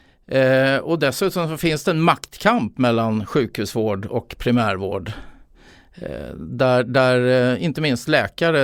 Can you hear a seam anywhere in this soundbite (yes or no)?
no